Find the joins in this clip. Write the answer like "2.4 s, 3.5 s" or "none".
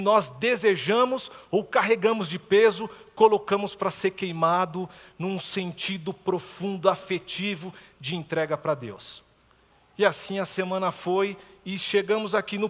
none